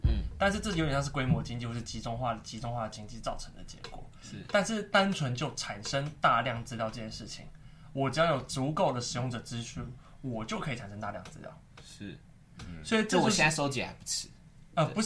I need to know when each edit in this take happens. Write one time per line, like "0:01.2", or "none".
none